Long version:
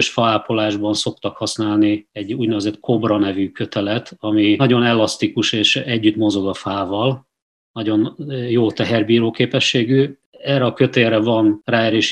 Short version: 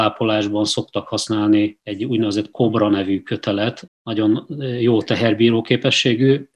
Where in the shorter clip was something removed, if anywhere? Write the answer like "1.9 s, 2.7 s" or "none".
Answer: 3.9 s